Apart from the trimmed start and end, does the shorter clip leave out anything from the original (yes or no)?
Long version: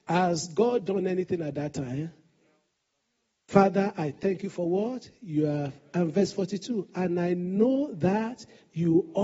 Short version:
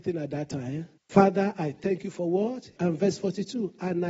yes